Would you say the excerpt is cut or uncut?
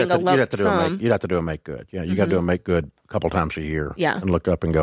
uncut